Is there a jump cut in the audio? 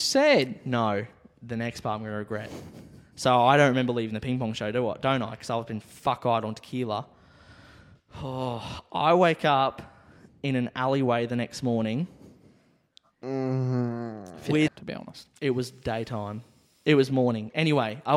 yes; 1 cut; at 14.7 s

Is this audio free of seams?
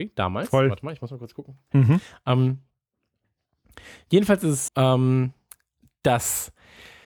no; 2 cuts; at 1.7 s, 4.7 s

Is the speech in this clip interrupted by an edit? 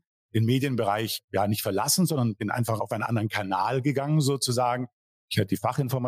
no; 0 cuts

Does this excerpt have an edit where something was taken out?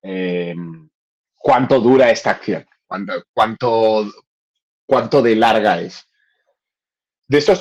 yes; 1 cut; at 3.2 s

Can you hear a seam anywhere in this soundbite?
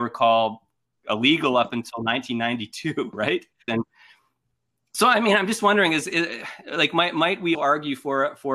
yes; 2 cuts; at 3.7 s, 7.5 s

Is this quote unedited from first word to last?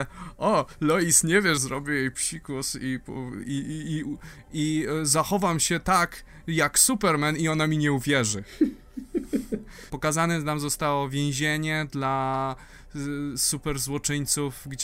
no; 2 cuts; at 1.6 s, 9.9 s

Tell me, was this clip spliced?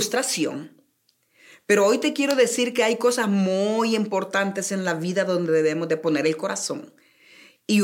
no; 0 cuts

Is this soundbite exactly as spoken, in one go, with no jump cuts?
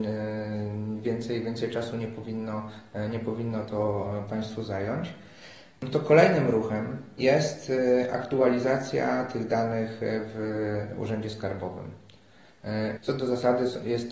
no; 1 cut; at 13.0 s

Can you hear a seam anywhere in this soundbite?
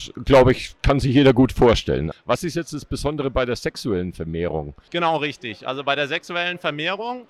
yes; 2 cuts; at 2.1 s, 4.9 s

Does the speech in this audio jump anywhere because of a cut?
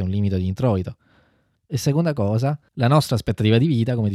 yes; 2 cuts; at 1.6 s, 2.7 s

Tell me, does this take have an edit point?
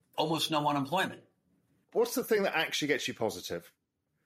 yes; 1 cut; at 1.8 s

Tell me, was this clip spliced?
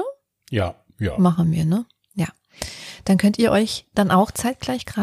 no; 0 cuts

